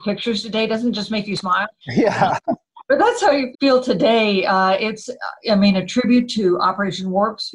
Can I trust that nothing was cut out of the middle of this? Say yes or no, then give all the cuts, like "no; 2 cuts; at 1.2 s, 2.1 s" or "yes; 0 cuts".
no; 2 cuts; at 1.8 s, 3.5 s